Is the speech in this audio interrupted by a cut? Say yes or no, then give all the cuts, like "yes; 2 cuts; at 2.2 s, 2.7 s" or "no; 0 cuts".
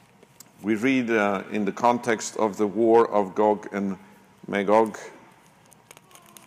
no; 0 cuts